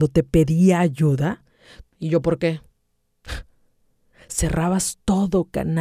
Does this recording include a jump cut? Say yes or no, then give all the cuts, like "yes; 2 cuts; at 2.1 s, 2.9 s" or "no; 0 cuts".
yes; 2 cuts; at 1.9 s, 4.1 s